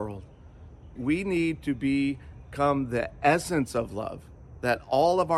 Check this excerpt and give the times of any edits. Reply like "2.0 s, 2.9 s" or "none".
1.0 s